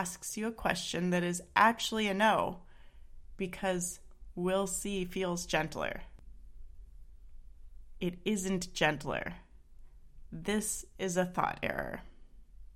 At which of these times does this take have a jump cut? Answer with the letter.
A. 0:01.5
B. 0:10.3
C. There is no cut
C